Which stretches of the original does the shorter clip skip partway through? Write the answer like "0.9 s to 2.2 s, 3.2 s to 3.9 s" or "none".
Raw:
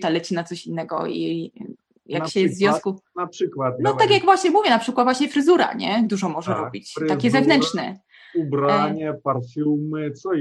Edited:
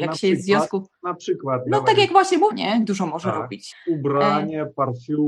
4.6 s to 5.7 s, 6.9 s to 8.2 s